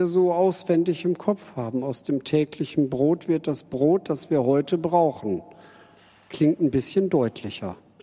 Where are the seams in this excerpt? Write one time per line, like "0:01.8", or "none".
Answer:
none